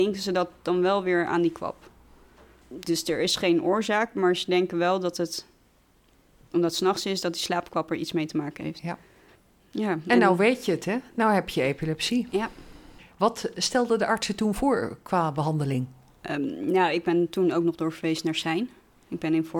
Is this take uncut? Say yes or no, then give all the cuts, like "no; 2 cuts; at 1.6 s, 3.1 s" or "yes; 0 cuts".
yes; 0 cuts